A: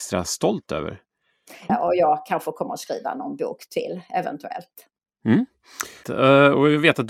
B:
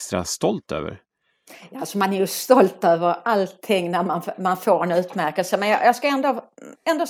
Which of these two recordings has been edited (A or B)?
A